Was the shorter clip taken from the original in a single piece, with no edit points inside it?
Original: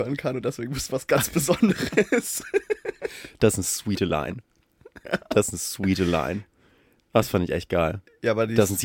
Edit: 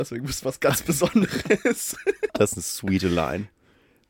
no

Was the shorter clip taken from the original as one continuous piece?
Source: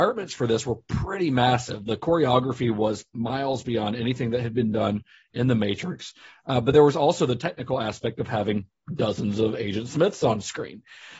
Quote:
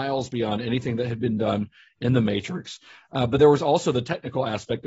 yes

